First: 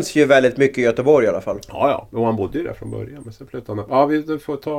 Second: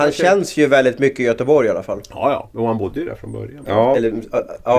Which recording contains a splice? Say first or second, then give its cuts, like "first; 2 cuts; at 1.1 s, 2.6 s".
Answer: second; 1 cut; at 3.6 s